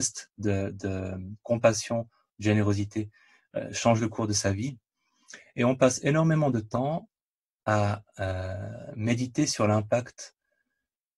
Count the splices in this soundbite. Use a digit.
0